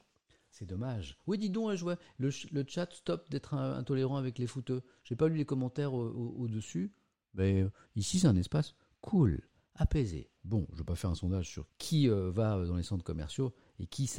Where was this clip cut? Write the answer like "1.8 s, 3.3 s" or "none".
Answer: 10.4 s, 11.7 s